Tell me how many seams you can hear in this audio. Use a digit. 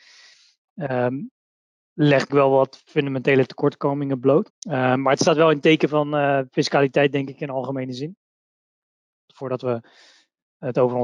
3